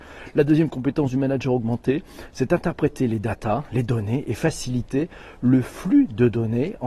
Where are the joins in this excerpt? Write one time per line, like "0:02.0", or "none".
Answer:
none